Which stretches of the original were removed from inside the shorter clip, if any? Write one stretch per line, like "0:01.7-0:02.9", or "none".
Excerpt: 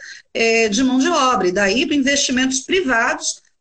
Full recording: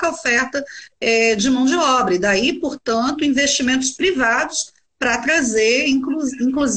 0:02.6-0:03.2